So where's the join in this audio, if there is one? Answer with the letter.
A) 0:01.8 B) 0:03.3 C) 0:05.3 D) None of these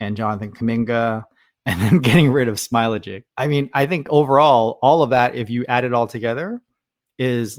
B